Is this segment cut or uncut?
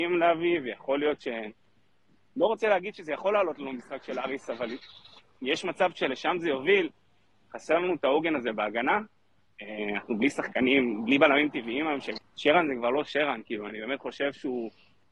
cut